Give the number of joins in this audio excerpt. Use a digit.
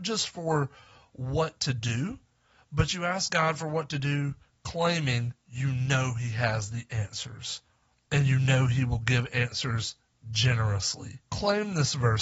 1